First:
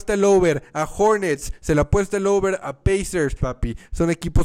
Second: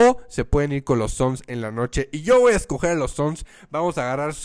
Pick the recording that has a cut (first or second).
first